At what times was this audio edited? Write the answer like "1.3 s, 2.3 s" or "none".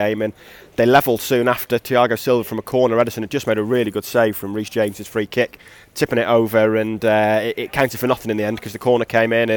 none